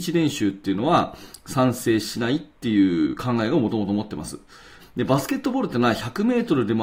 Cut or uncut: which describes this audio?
cut